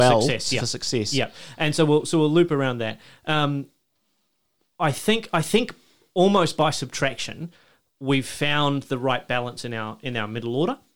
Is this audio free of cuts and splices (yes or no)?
yes